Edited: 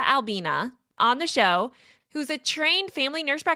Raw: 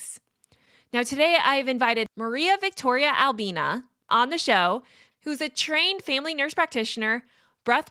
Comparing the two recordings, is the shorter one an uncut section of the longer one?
yes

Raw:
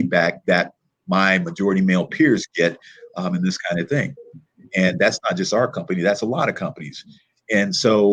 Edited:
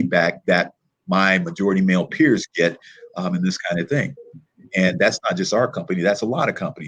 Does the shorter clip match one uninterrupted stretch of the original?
yes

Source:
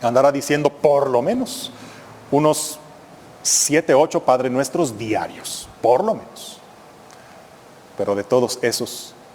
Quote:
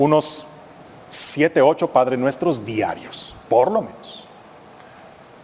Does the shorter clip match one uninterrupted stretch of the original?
yes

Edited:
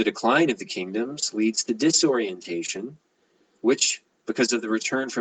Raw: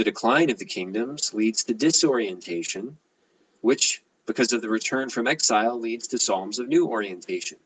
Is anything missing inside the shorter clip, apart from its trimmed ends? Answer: no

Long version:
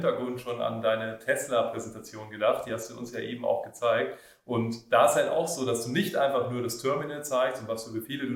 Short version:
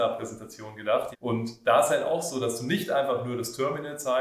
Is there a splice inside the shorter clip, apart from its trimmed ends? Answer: yes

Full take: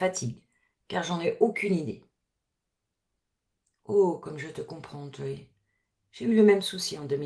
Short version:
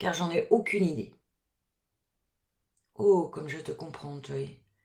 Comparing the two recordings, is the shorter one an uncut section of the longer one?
yes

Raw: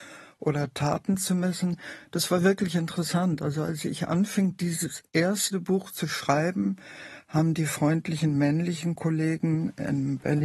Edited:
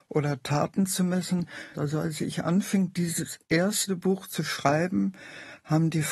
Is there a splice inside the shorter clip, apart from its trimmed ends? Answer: yes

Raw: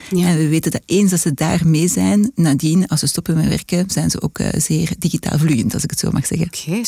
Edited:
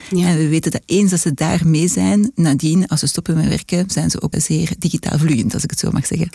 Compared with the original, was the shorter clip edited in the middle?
yes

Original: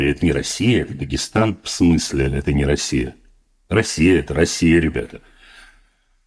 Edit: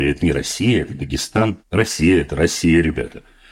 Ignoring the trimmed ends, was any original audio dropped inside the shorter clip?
yes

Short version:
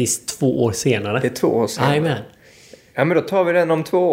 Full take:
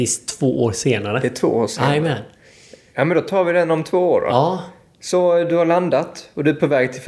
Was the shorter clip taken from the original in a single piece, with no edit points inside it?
yes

